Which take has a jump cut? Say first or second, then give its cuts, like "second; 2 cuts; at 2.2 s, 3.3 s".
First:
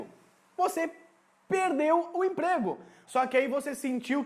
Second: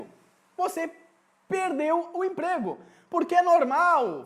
first; 1 cut; at 3.0 s